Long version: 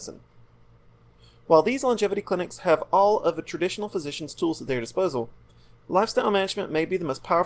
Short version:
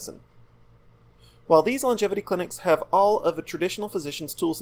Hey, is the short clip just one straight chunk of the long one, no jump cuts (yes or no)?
yes